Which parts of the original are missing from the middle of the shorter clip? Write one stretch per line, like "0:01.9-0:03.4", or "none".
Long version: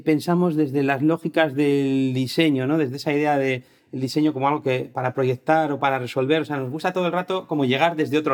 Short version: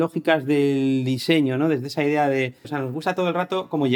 0:03.7-0:06.4